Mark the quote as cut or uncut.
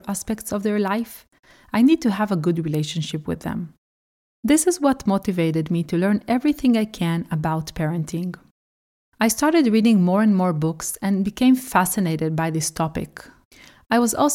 uncut